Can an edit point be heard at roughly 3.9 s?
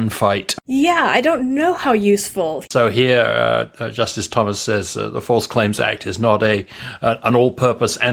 no; 1 cut; at 2.6 s

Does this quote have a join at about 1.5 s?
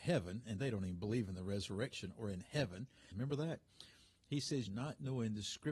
no; 2 cuts; at 3.1 s, 4.7 s

